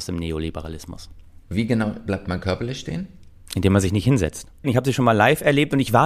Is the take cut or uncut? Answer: cut